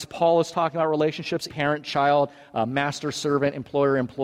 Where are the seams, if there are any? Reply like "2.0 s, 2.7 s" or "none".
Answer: 1.5 s

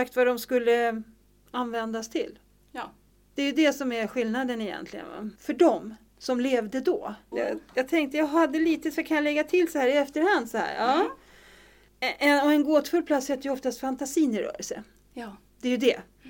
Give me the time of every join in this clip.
5.4 s, 7.3 s

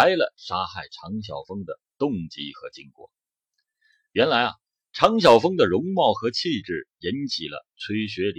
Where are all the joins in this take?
none

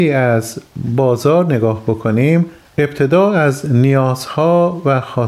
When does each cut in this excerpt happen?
none

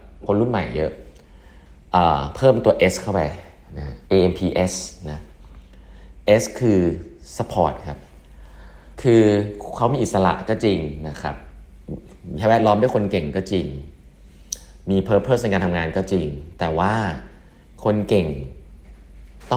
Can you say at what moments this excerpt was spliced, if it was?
4.0 s, 8.9 s

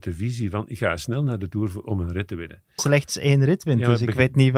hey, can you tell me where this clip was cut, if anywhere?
2.8 s

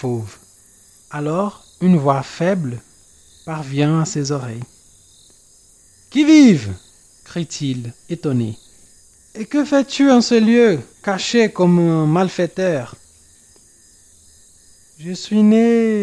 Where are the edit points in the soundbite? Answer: 1.0 s, 9.3 s, 10.9 s

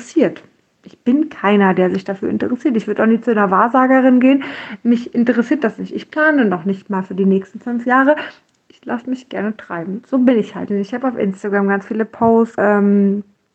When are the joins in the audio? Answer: 10.7 s, 12.6 s

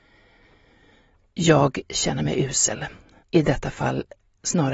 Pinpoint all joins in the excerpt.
3.2 s

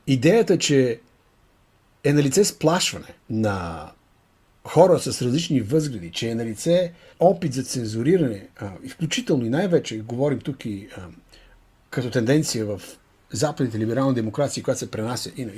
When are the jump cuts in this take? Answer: 3.2 s

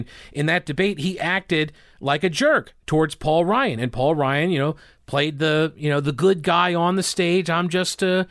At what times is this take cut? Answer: none

